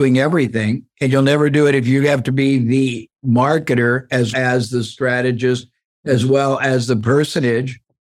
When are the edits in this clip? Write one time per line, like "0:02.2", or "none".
0:04.3